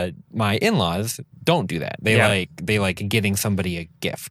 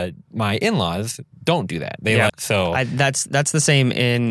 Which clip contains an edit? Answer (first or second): second